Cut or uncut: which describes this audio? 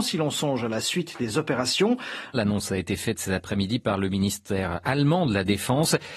cut